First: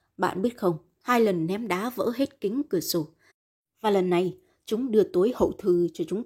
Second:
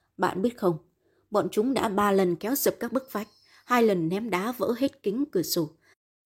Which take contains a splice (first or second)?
first